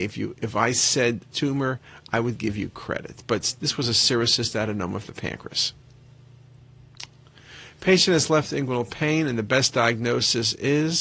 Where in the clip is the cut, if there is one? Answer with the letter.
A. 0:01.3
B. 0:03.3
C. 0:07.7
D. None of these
A